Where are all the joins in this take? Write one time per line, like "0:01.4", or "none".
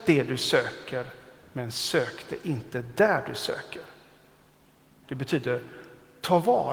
none